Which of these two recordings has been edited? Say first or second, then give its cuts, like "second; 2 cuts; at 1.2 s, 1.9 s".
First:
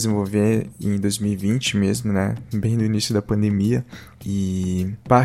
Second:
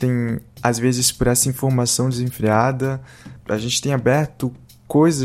second; 1 cut; at 3.4 s